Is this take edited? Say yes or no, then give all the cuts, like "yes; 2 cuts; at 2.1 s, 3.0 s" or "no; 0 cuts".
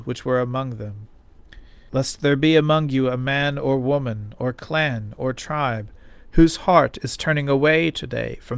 yes; 1 cut; at 1.9 s